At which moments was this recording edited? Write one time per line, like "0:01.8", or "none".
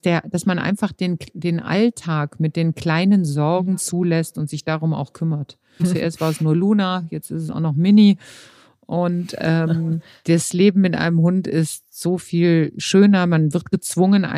0:05.8